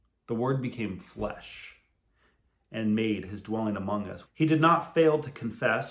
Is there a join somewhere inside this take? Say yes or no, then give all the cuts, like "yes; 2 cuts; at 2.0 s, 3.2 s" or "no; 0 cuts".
yes; 1 cut; at 4.3 s